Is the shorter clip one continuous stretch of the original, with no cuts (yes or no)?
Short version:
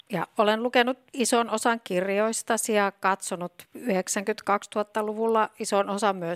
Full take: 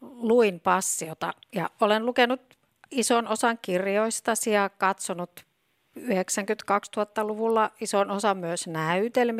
no